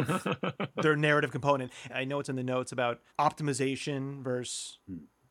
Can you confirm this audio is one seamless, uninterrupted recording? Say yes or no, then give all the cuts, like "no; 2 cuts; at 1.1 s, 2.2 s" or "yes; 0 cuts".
no; 2 cuts; at 1.9 s, 3.1 s